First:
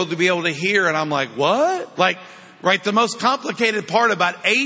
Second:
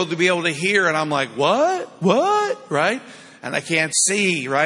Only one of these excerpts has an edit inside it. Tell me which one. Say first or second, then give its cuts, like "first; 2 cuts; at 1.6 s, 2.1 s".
first; 1 cut; at 1.9 s